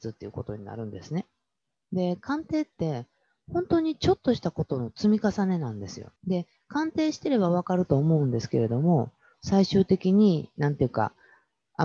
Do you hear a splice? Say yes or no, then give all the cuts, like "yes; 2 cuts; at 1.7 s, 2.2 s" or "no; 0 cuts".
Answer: yes; 2 cuts; at 6.2 s, 9.3 s